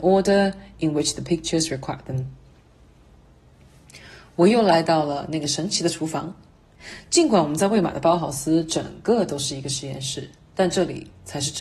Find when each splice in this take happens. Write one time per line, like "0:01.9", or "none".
none